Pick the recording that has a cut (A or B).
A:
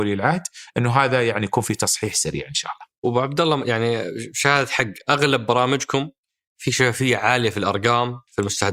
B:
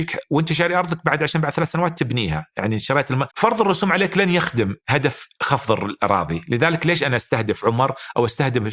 B